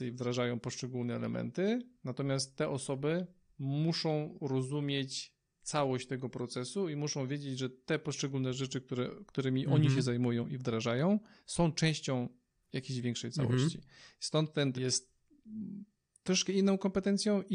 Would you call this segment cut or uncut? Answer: cut